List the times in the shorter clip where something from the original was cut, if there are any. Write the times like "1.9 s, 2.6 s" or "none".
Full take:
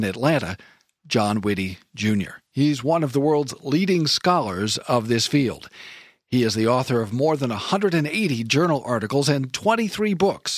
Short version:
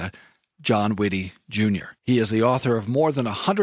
2.0 s

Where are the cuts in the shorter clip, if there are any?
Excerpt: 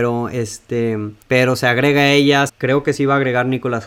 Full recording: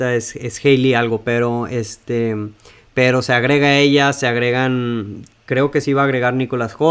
1.2 s, 2.5 s

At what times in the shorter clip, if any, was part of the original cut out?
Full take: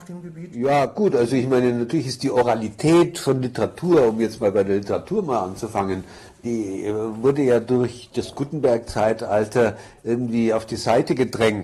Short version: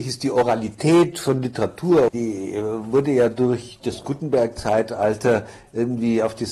2.1 s

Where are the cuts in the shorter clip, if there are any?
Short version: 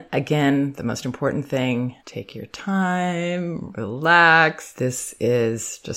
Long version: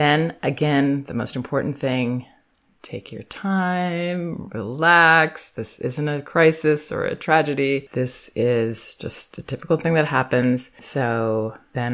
2.0 s, 4.7 s

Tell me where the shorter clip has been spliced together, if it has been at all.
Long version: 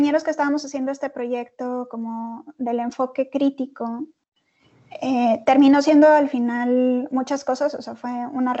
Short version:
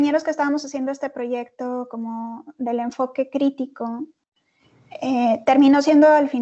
none

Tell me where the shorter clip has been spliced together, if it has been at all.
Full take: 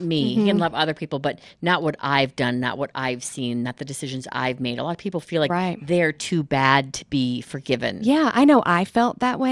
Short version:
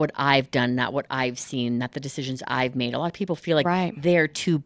none

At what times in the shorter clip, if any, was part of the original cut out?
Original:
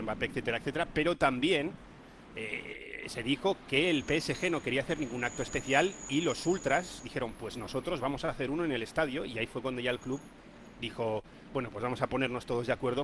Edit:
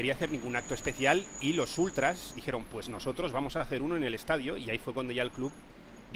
none

